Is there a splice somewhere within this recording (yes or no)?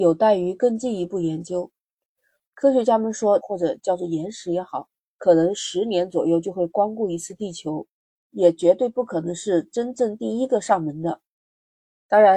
yes